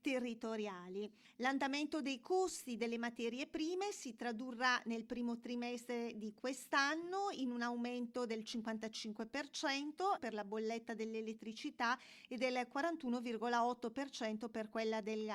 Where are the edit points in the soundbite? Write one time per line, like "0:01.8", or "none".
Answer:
0:10.2